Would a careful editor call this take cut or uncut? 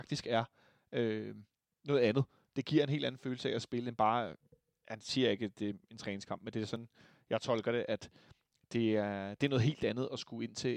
uncut